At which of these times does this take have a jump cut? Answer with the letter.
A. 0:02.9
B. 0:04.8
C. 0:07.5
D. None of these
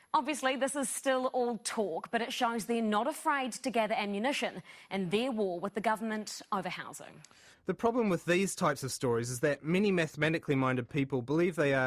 D